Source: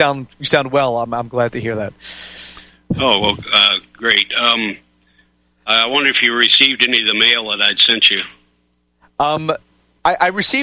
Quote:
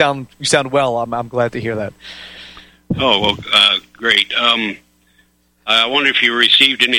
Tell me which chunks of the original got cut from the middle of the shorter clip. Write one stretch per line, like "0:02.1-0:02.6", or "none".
none